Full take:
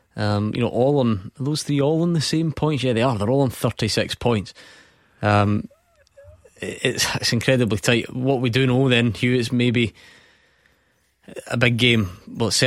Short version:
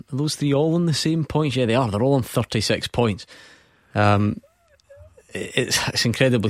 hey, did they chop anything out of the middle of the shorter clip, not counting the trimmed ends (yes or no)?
no